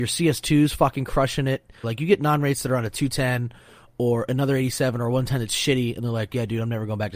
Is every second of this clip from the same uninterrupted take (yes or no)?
no